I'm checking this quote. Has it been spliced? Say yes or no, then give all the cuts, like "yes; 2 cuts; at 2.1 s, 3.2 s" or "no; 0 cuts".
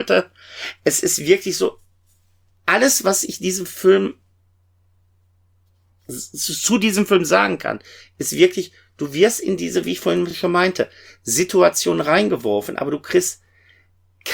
no; 0 cuts